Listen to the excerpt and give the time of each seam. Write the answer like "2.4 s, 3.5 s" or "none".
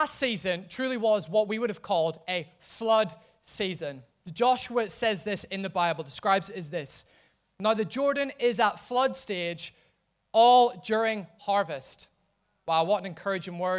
none